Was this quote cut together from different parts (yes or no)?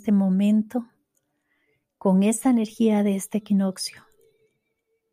no